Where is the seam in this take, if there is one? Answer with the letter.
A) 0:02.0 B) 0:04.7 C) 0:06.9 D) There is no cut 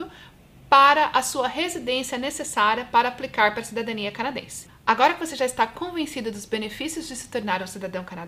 B